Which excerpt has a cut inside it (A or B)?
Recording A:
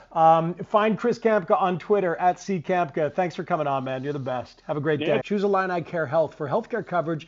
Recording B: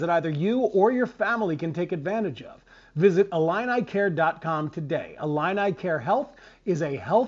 A